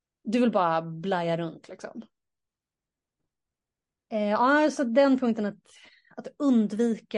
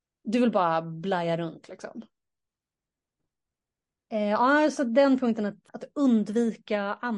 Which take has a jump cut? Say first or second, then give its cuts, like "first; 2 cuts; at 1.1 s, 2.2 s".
second; 1 cut; at 5.7 s